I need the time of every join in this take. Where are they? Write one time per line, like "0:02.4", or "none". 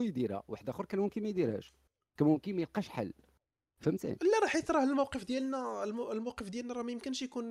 none